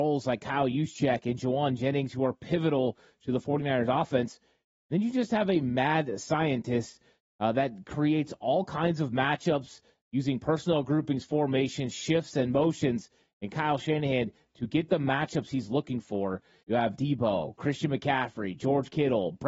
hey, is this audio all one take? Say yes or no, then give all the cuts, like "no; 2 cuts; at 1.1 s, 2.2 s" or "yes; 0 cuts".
no; 1 cut; at 16.6 s